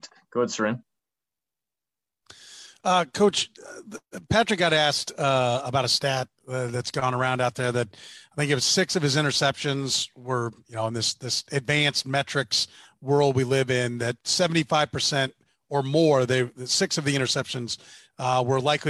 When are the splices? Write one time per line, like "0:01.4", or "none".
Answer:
none